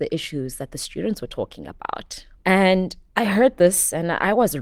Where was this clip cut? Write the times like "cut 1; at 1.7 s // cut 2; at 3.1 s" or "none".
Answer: cut 1; at 2.4 s